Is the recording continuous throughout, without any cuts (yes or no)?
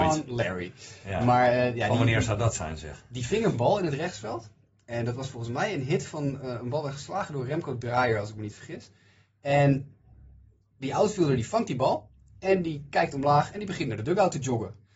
yes